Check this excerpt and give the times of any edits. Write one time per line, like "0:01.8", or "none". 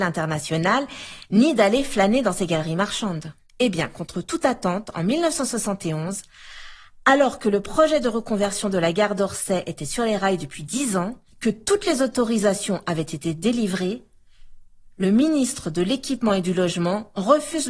none